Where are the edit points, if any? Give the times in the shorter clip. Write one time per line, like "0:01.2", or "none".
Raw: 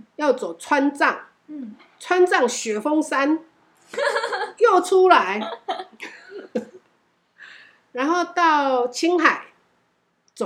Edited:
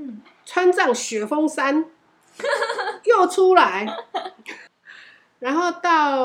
0:04.7